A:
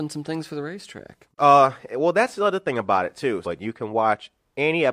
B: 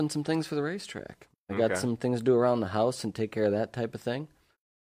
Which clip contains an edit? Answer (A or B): A